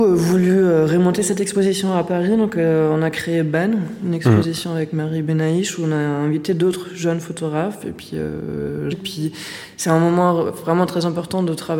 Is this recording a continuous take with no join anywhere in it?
no; 1 cut; at 8.9 s

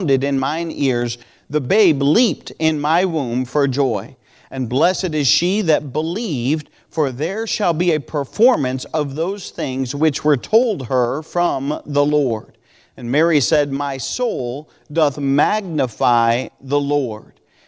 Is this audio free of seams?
yes; 0 cuts

